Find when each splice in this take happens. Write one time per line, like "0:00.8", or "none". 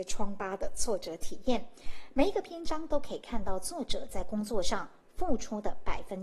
none